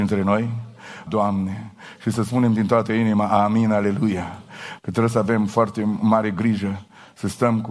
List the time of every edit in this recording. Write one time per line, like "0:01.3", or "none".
0:01.1
0:04.8